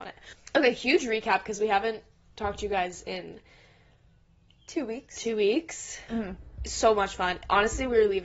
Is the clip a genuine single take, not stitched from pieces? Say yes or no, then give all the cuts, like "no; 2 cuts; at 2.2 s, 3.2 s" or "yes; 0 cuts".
no; 1 cut; at 6.1 s